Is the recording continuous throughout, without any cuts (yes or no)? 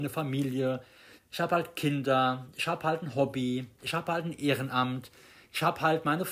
no